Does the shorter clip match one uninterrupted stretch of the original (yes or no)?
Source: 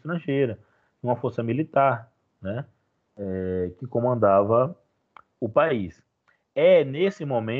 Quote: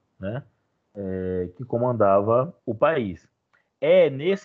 no